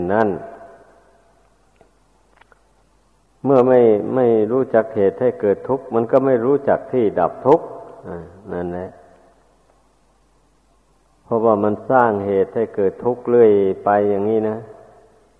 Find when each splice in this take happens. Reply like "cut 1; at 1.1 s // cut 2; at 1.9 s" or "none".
none